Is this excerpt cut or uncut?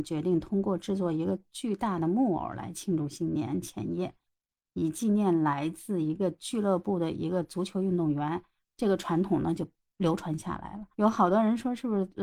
uncut